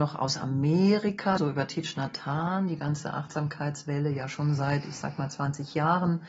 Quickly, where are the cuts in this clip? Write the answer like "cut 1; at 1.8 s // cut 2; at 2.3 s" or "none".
cut 1; at 1.4 s